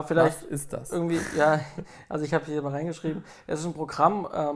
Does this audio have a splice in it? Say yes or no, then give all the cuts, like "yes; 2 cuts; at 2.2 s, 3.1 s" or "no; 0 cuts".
no; 0 cuts